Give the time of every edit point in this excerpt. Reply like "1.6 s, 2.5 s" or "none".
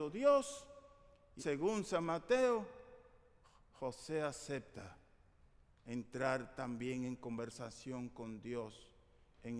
1.4 s